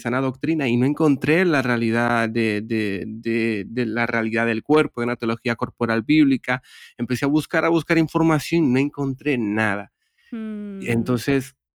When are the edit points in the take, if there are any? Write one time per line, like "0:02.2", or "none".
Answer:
none